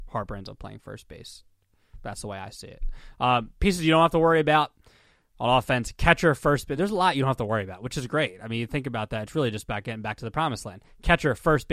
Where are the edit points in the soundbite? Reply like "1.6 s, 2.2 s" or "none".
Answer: none